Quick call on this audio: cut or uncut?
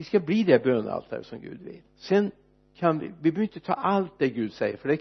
cut